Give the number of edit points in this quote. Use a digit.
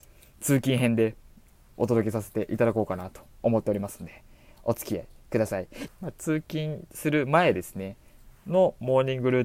1